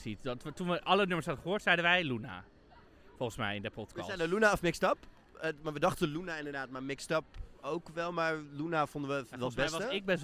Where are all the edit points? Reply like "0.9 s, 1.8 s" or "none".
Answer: none

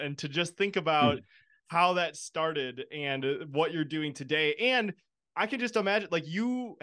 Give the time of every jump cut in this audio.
none

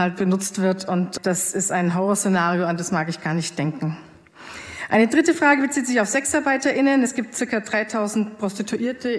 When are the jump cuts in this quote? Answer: none

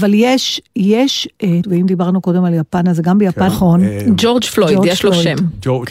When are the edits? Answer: 1.6 s, 3.5 s

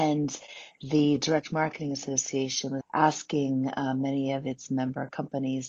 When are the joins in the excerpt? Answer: 2.8 s

